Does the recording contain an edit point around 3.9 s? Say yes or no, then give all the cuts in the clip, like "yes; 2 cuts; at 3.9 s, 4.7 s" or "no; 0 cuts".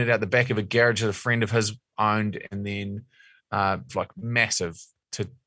yes; 1 cut; at 3.9 s